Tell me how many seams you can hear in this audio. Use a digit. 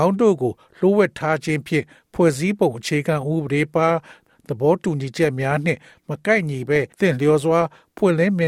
1